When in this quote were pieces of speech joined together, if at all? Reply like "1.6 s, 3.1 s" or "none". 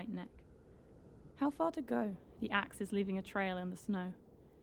1.3 s, 2.4 s